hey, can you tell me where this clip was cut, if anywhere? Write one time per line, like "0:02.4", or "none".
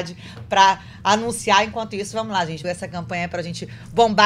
0:02.6